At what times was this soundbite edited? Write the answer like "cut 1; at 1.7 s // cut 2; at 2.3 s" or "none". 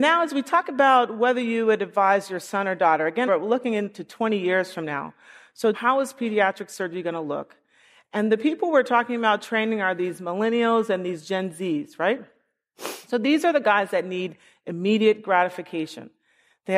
cut 1; at 3.3 s // cut 2; at 5.7 s